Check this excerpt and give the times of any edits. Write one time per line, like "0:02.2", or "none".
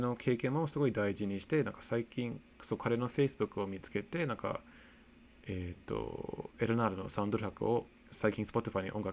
0:05.8